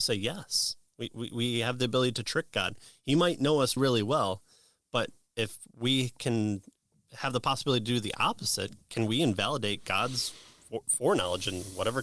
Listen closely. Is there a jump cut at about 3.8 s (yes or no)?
yes